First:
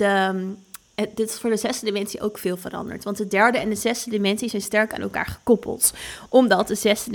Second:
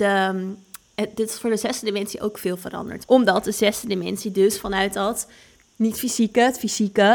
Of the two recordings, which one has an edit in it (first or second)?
second